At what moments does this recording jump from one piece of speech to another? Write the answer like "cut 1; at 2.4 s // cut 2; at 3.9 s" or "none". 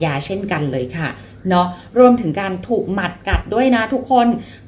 none